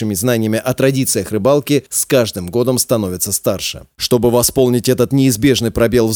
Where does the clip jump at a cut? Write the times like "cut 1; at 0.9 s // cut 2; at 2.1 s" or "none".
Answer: cut 1; at 3.9 s